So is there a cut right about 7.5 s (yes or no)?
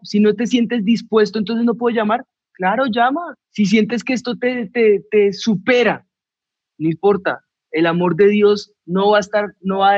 no